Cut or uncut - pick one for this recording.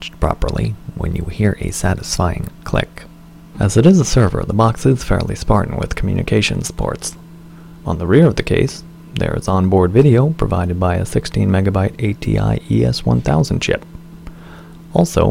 cut